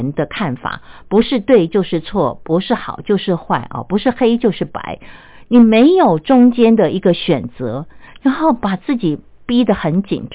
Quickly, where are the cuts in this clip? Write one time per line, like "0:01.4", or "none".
none